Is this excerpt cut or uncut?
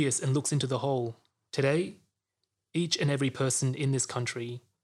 cut